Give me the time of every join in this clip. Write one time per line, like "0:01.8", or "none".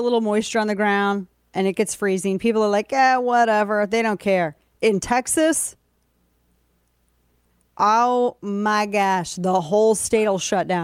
none